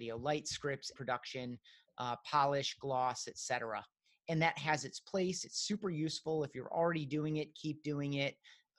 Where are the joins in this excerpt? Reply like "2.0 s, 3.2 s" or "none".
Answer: 0.9 s